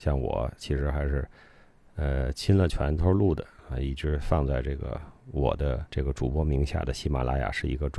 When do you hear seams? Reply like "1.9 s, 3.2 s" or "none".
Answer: 3.0 s, 5.9 s